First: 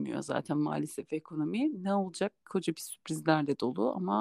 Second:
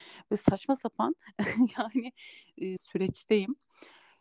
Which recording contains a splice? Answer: second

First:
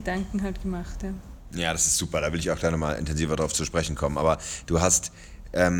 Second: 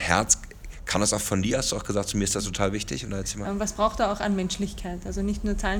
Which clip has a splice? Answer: second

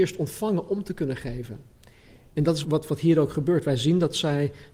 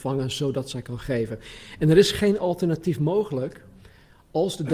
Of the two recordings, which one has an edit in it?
first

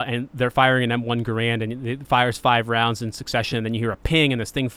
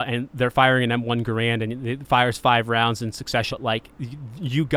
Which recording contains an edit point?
second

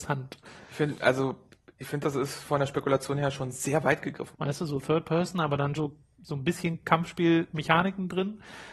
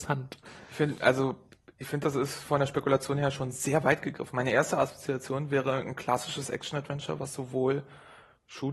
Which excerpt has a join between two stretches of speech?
first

